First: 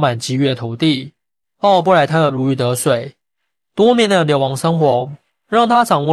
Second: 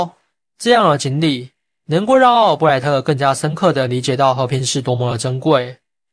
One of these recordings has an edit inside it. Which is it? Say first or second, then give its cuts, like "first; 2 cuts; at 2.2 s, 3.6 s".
first; 1 cut; at 1.4 s